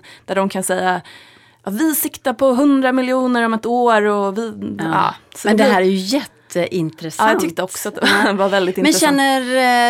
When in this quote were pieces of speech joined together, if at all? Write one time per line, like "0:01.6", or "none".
none